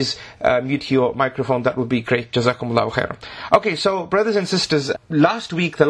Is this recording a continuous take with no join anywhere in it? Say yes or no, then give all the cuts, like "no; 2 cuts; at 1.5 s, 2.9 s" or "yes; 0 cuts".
no; 1 cut; at 4.9 s